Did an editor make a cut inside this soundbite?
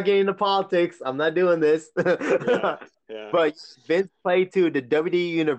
no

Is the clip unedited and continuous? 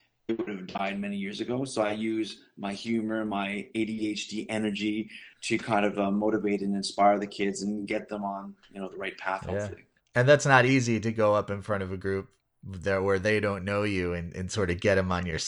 yes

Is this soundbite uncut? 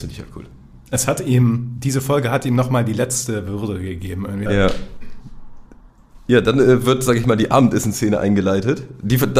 no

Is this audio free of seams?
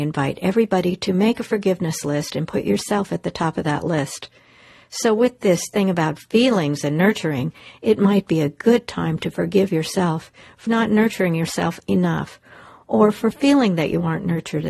no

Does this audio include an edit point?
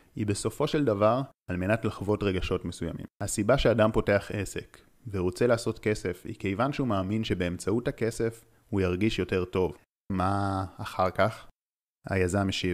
yes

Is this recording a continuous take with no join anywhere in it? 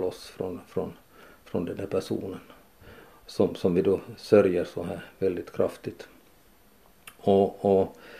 yes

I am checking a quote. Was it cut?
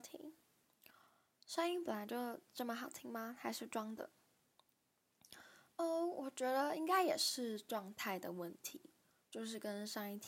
no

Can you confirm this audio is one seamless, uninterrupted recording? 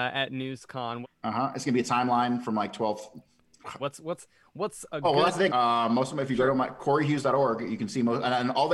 no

